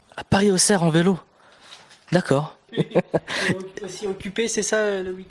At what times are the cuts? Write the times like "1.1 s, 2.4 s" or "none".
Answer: 2.7 s